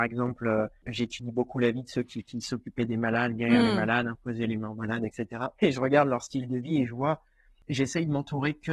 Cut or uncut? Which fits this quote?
uncut